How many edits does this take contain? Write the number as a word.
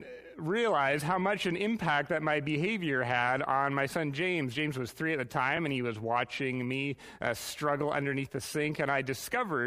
zero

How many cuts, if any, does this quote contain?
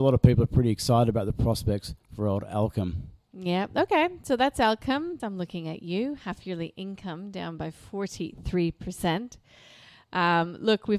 one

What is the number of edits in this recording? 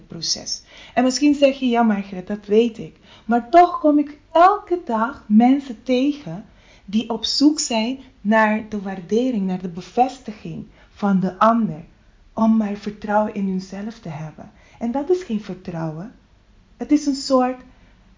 zero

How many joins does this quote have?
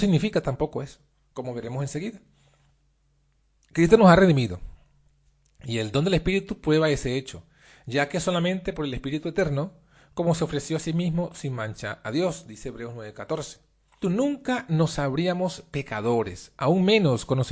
one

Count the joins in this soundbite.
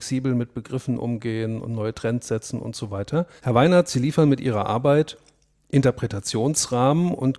one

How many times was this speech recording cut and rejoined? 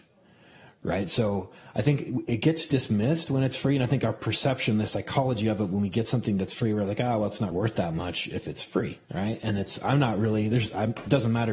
two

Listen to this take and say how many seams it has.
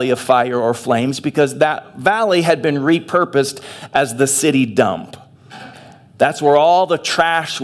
zero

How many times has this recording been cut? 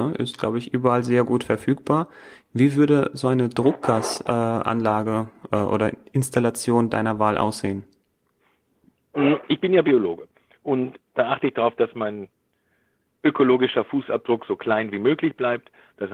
zero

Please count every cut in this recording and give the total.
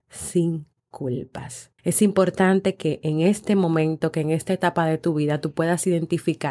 one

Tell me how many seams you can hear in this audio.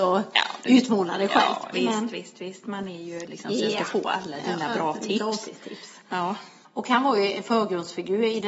three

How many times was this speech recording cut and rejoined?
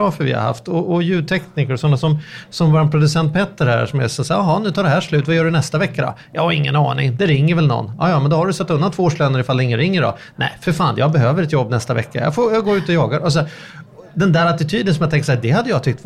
zero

